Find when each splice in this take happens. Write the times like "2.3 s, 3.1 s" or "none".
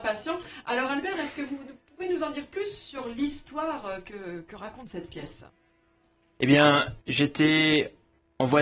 7.0 s